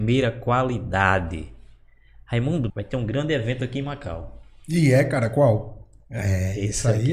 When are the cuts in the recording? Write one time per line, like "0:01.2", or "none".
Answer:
0:02.7
0:06.0